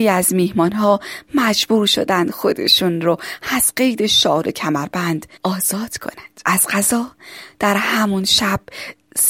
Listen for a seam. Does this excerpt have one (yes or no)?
yes